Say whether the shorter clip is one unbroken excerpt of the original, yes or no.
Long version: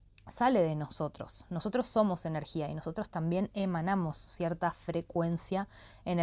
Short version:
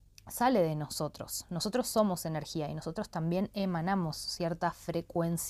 yes